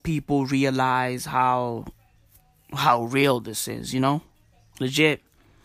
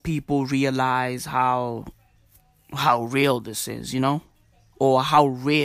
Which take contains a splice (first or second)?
first